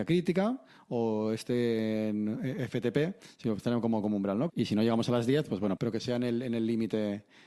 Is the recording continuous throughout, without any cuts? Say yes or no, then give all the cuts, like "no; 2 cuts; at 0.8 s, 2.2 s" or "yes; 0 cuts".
no; 2 cuts; at 4.5 s, 5.8 s